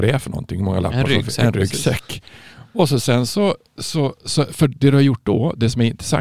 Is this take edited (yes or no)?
no